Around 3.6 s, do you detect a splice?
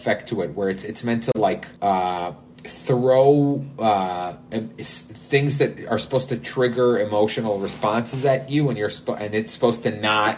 no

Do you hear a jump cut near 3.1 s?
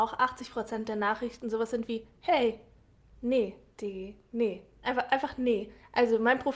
yes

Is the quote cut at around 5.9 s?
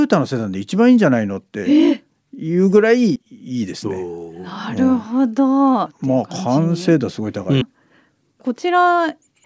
yes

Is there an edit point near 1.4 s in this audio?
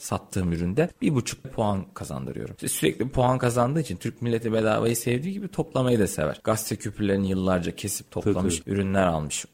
yes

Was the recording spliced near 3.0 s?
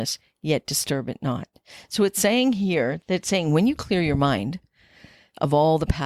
yes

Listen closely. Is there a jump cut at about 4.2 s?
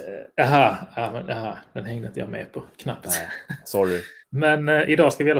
yes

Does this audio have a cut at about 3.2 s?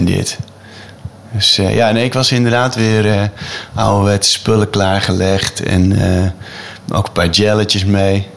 no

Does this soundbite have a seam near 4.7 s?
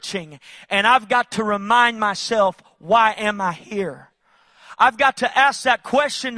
no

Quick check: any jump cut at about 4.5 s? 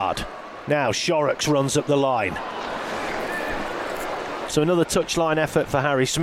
yes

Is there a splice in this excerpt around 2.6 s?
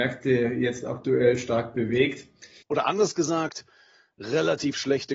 yes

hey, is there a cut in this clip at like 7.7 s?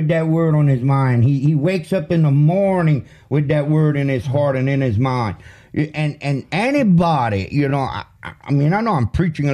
no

